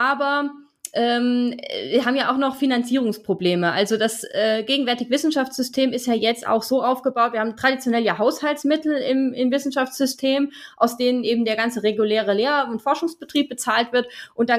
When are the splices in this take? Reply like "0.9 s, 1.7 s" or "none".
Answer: none